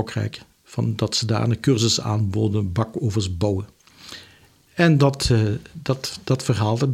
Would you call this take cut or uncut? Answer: uncut